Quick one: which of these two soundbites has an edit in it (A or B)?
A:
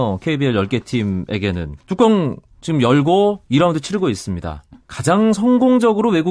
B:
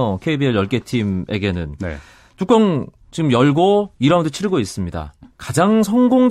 A